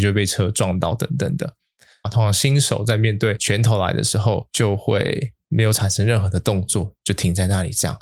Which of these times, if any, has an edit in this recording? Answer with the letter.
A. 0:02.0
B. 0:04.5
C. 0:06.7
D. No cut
A